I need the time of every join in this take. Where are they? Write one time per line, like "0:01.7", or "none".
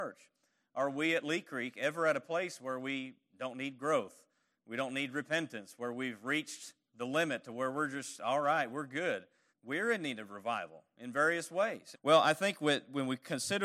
0:09.5
0:11.9